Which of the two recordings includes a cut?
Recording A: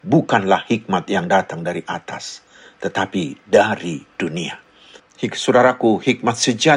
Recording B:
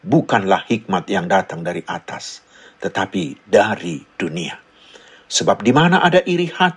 A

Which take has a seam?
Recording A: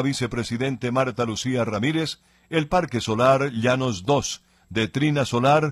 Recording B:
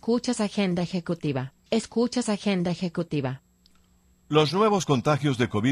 B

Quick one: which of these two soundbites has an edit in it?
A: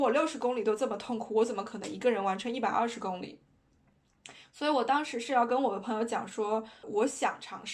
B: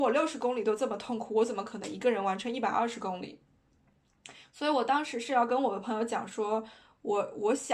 A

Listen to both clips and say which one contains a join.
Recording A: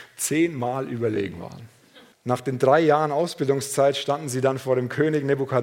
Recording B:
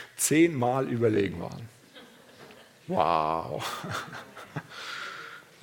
A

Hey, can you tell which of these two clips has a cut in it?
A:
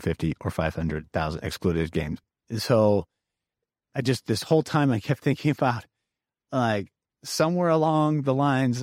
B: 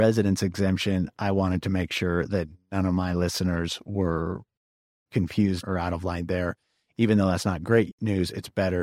B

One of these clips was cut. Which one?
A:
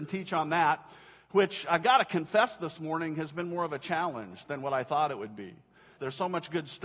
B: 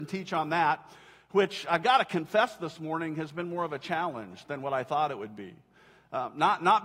A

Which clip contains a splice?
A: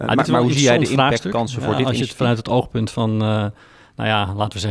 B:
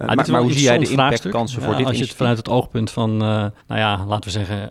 B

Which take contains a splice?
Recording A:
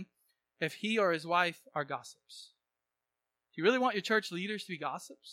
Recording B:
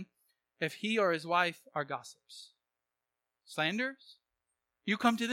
B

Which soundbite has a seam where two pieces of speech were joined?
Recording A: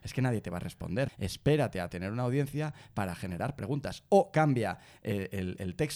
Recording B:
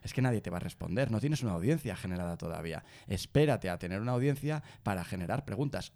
A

